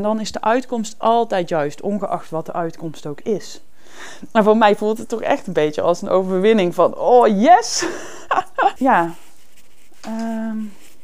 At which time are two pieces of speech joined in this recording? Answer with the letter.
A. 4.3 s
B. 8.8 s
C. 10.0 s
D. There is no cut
B